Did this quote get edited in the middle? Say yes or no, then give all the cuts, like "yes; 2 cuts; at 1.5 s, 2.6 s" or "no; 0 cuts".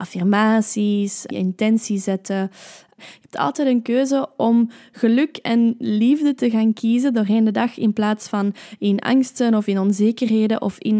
yes; 2 cuts; at 1.3 s, 3.0 s